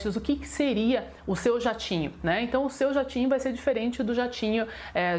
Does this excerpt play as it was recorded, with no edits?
yes; 0 cuts

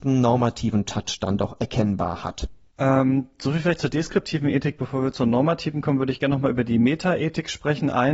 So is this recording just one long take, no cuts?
yes; 0 cuts

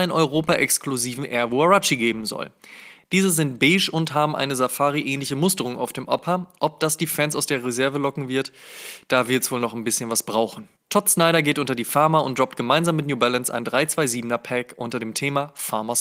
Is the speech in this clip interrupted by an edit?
yes; 1 cut; at 10.8 s

